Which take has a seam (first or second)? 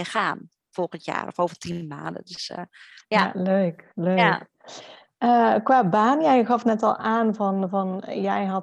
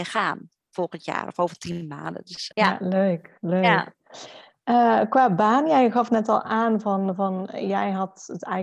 second